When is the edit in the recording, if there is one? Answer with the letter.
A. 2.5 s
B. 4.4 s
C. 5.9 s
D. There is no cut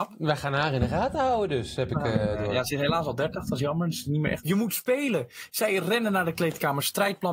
B